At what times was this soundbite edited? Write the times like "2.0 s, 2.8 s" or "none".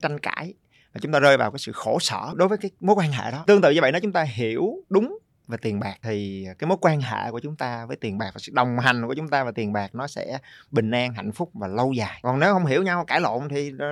4.8 s